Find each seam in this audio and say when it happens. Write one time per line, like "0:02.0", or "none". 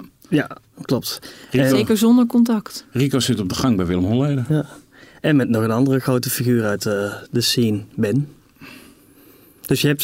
none

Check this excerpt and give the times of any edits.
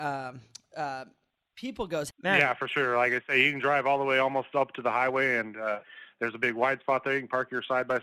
0:02.1

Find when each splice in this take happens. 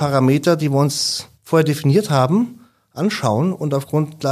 0:01.3

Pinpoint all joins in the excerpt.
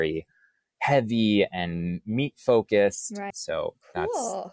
0:03.3

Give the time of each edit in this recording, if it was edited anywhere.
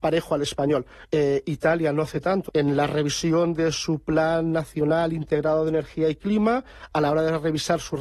0:01.0
0:02.5

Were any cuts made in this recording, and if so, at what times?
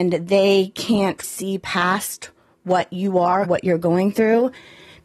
0:01.2
0:03.4

